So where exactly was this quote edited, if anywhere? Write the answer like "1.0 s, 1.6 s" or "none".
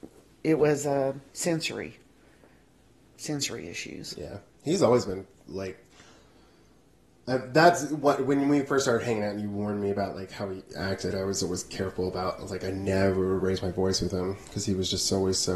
1.3 s